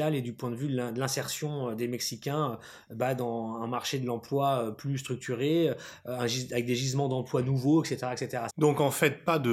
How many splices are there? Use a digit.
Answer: 1